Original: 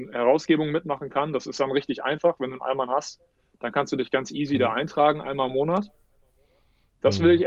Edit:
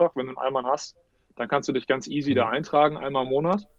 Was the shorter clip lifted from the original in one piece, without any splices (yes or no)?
yes